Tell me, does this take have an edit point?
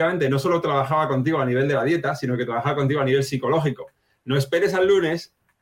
no; 0 cuts

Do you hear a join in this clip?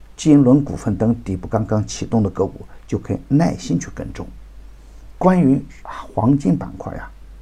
no; 0 cuts

